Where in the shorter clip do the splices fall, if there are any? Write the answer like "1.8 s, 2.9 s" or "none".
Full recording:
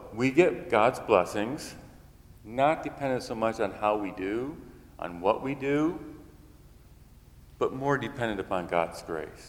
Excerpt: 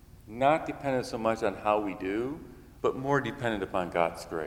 2.8 s

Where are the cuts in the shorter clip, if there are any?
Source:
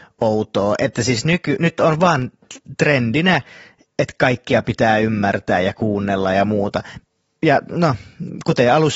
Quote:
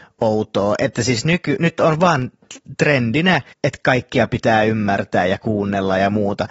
3.5 s

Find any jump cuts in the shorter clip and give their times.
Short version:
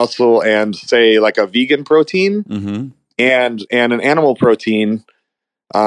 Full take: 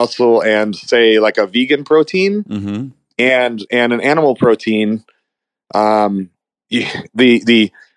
none

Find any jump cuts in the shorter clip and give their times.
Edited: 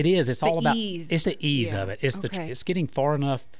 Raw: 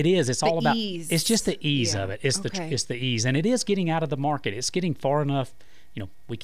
1.2 s, 2.5 s

